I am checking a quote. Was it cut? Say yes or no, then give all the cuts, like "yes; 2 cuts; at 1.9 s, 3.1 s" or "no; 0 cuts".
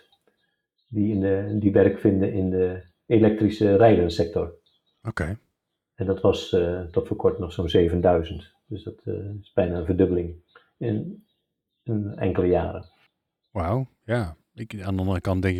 no; 0 cuts